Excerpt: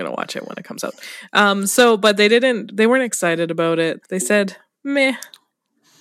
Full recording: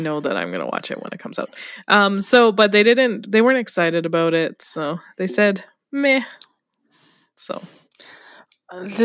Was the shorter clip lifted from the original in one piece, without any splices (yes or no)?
no